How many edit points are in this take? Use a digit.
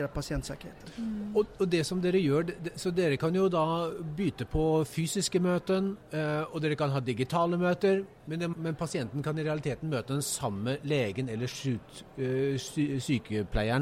1